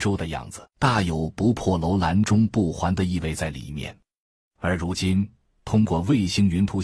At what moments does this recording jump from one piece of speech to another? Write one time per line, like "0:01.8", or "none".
none